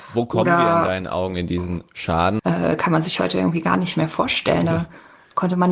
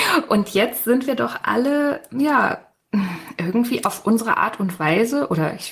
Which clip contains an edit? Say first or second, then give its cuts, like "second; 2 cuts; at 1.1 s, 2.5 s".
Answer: first; 1 cut; at 2.4 s